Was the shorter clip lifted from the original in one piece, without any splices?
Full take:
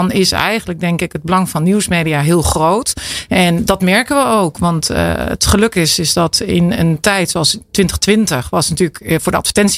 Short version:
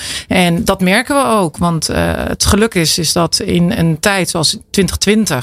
yes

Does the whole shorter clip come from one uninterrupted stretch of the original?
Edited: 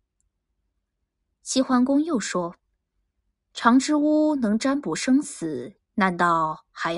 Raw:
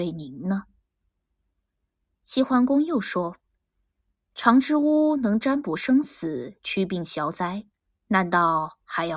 no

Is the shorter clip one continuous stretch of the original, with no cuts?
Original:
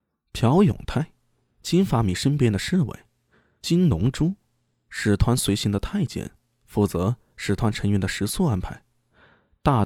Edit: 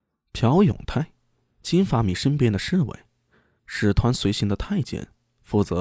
no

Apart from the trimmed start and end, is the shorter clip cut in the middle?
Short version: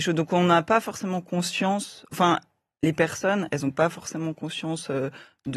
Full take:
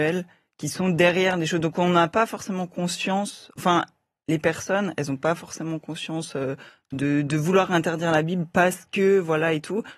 no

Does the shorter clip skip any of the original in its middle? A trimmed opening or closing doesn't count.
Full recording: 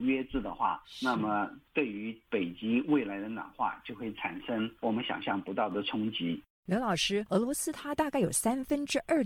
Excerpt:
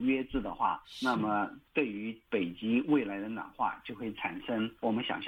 no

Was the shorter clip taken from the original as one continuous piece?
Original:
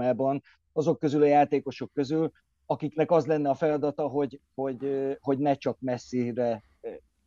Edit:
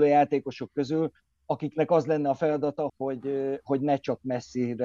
no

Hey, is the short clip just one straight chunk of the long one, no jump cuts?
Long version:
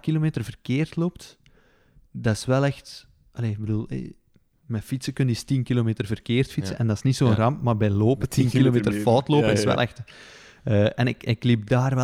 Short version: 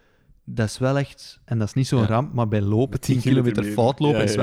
no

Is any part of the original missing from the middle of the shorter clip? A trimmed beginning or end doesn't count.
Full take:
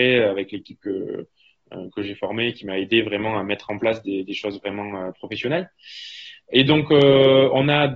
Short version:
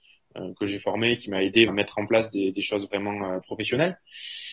yes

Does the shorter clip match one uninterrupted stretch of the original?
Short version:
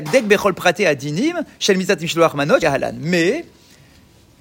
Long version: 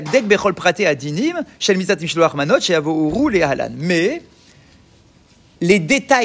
no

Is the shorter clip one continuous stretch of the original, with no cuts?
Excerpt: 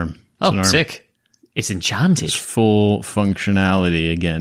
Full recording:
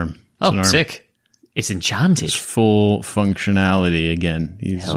yes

